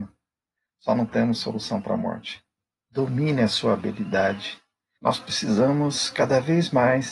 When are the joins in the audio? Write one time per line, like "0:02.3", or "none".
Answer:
0:02.9
0:05.0